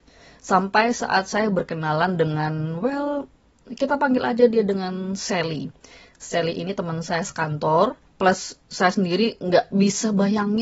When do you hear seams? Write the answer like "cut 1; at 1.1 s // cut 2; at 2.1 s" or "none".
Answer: cut 1; at 8.1 s